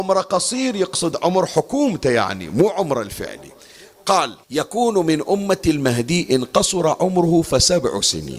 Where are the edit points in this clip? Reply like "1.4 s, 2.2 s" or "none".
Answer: 4.4 s